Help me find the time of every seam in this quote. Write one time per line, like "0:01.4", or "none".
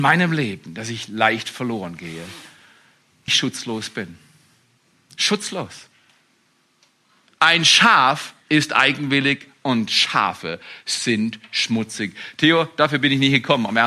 0:03.3
0:07.3